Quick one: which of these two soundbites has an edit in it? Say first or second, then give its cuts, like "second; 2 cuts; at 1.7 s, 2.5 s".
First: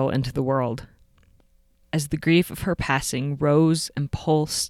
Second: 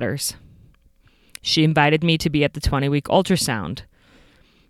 first; 1 cut; at 1.8 s